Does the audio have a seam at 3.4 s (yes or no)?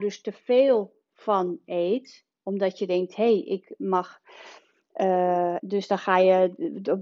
no